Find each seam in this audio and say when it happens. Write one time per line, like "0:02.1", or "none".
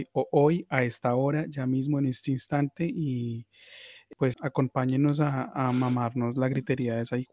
0:04.3